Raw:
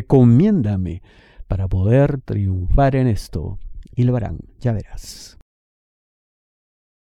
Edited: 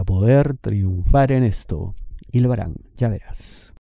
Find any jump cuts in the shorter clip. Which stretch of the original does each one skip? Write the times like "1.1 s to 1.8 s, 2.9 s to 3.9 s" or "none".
none